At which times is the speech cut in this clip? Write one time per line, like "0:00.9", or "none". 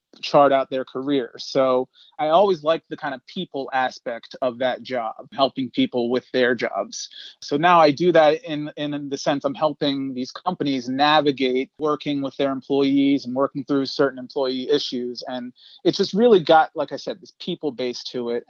none